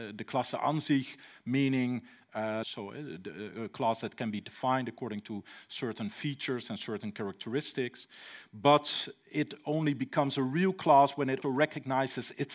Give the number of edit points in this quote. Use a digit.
2